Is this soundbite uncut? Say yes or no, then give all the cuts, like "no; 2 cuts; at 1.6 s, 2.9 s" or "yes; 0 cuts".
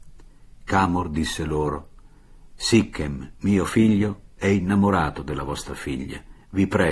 yes; 0 cuts